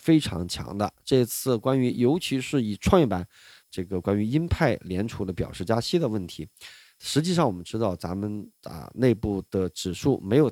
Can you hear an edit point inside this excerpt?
yes; 1 cut; at 3.6 s

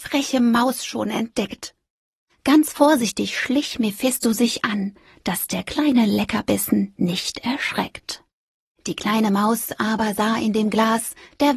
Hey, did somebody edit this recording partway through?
no; 0 cuts

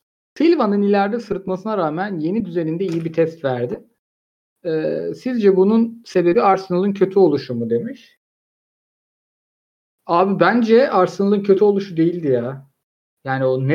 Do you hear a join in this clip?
no; 0 cuts

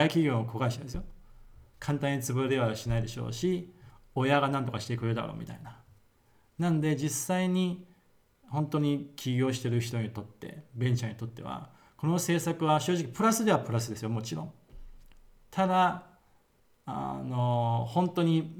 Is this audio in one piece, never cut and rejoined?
yes; 0 cuts

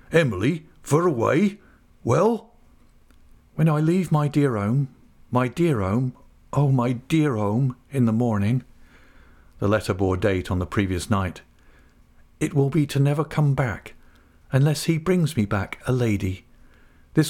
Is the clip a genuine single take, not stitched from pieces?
yes; 0 cuts

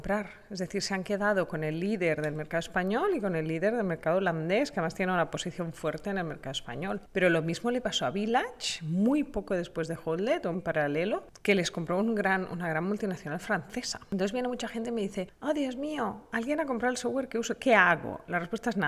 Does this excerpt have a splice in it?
yes; 1 cut; at 10.5 s

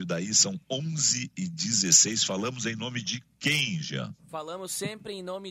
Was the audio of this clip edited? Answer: no; 0 cuts

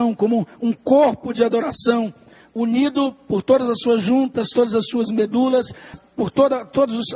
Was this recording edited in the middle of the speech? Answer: yes; 1 cut; at 5.9 s

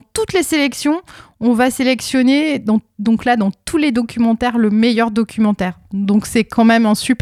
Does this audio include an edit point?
no; 0 cuts

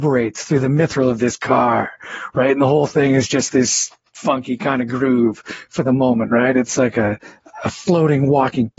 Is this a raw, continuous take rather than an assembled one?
yes; 0 cuts

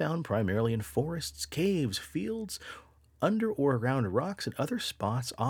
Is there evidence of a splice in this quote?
no; 0 cuts

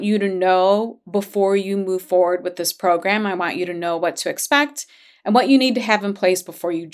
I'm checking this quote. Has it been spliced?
no; 0 cuts

